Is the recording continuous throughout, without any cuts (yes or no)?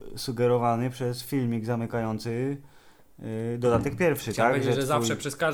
yes